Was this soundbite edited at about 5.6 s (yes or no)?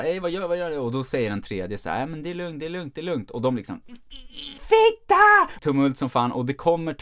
yes